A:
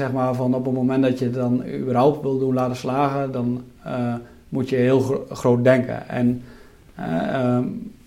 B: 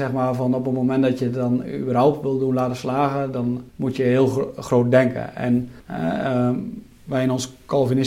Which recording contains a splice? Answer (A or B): B